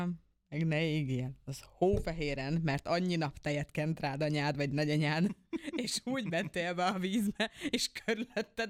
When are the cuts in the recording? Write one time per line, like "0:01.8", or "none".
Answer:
none